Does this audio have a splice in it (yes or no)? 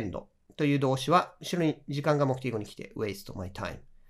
no